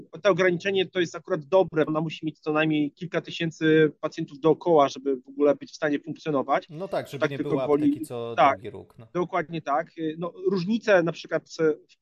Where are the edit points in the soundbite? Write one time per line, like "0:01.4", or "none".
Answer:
0:01.9